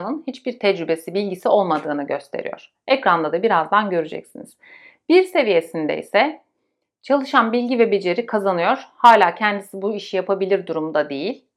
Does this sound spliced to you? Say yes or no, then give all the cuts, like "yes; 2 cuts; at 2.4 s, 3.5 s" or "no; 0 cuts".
no; 0 cuts